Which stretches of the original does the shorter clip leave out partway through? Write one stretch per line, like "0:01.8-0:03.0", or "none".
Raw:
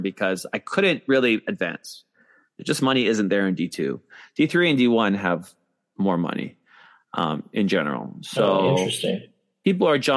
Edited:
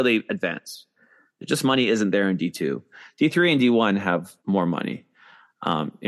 0:05.6-0:05.9